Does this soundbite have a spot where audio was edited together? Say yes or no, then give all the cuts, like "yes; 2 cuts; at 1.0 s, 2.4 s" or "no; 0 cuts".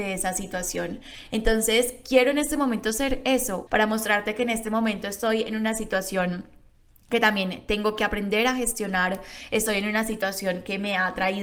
yes; 1 cut; at 3.7 s